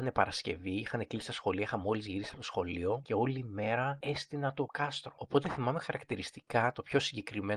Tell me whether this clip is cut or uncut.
cut